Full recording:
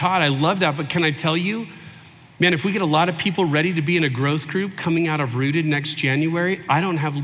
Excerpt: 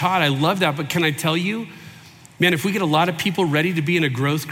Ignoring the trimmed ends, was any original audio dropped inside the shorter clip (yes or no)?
no